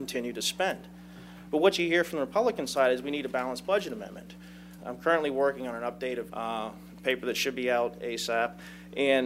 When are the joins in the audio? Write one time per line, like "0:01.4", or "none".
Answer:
0:01.5
0:04.8
0:06.3